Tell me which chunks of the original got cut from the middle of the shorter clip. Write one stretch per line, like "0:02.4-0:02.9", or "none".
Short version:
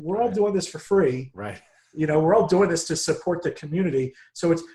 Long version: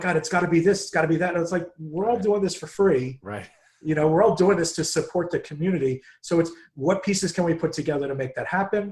none